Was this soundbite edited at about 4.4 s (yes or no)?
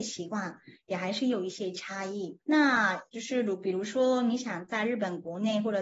no